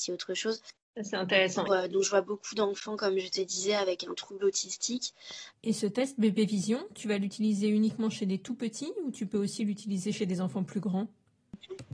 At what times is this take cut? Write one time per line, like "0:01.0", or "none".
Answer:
0:01.6
0:05.5